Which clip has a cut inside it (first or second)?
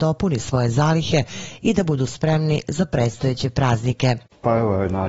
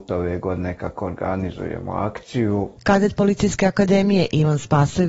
second